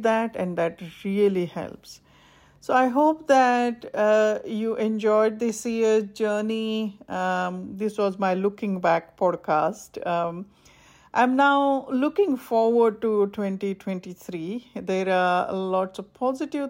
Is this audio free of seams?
yes; 0 cuts

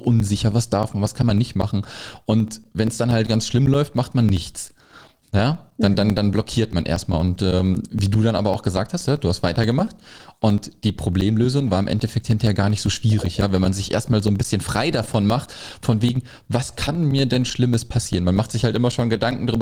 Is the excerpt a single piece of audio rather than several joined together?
yes; 0 cuts

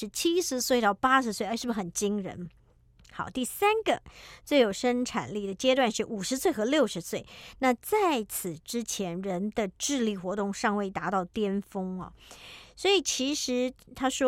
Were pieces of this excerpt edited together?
no; 0 cuts

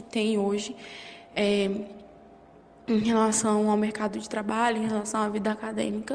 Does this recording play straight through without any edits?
no; 1 cut; at 1.3 s

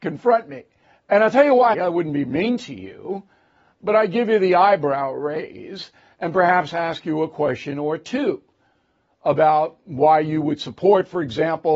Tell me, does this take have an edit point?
yes; 1 cut; at 1.7 s

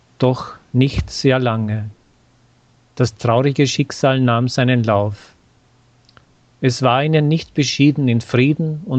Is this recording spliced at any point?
no; 0 cuts

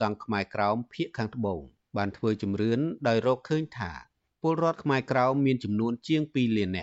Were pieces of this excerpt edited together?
no; 0 cuts

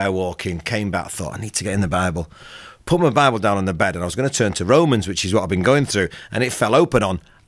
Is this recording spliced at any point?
no; 0 cuts

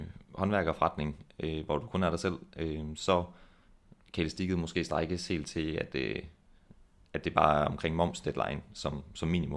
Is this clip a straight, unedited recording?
yes; 0 cuts

